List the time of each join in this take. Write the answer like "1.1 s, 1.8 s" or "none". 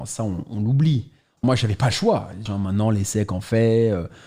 1.4 s, 2.5 s